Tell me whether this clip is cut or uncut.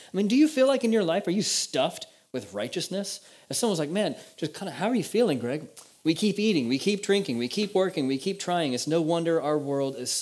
cut